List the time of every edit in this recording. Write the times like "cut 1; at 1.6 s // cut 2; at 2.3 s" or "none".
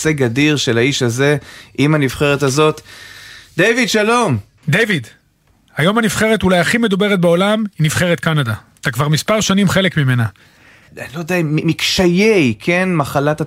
cut 1; at 4.6 s // cut 2; at 10.9 s

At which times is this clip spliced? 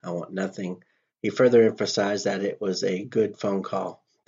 cut 1; at 1.1 s

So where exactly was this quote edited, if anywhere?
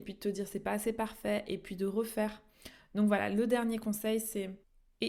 none

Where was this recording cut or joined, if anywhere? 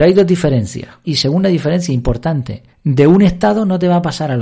cut 1; at 1.0 s // cut 2; at 2.7 s

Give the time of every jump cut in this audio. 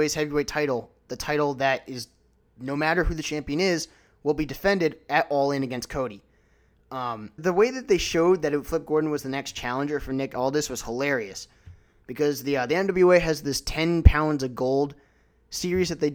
cut 1; at 7.4 s

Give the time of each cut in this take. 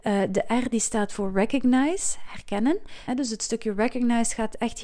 cut 1; at 3.1 s

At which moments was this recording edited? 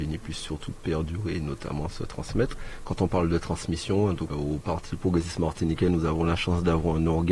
cut 1; at 4.3 s

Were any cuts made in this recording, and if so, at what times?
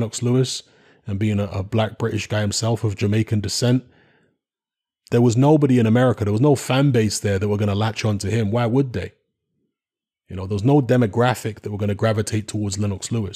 none

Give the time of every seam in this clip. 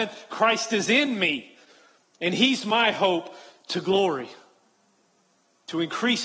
none

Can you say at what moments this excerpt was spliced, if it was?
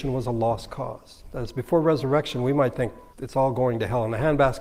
cut 1; at 3.1 s

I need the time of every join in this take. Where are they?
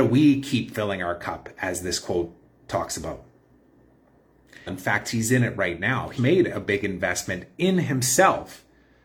cut 1; at 4.7 s // cut 2; at 6.2 s

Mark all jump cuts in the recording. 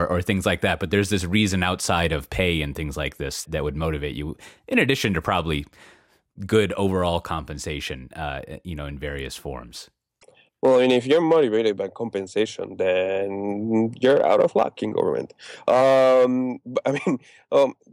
cut 1; at 3.5 s

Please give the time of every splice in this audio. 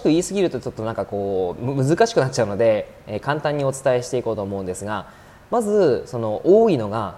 none

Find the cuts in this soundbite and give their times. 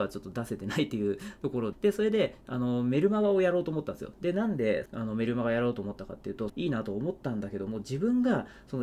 cut 1; at 1.7 s // cut 2; at 4.9 s // cut 3; at 6.5 s

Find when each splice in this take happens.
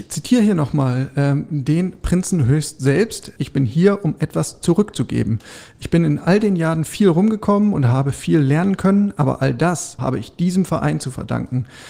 cut 1; at 3.4 s // cut 2; at 10.0 s

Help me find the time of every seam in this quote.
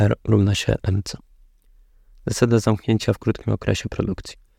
none

